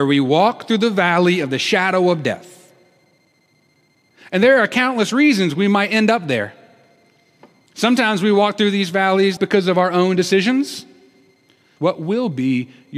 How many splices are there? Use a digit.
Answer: 2